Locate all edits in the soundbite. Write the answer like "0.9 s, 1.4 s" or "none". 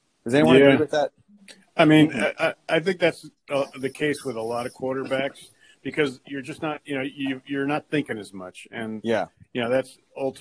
none